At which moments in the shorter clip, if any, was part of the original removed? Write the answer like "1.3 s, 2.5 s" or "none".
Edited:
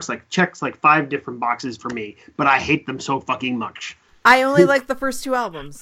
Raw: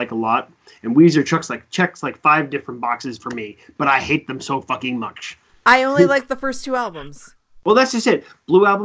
none